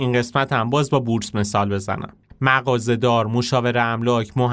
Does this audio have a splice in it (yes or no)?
yes